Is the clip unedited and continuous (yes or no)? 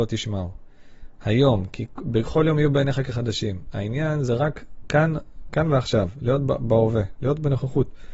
yes